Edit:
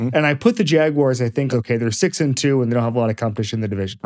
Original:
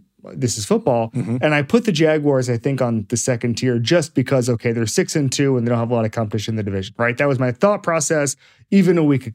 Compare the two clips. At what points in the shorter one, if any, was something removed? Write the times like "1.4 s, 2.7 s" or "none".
1.5 s